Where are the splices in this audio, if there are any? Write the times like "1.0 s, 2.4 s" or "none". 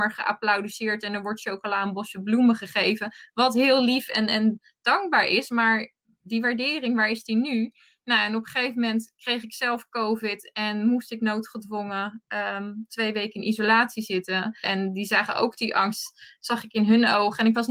14.6 s